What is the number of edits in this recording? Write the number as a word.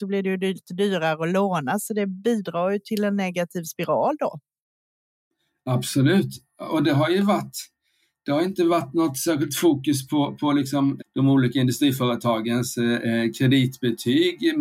one